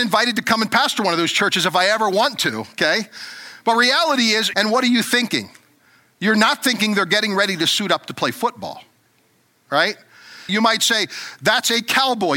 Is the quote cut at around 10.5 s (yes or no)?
yes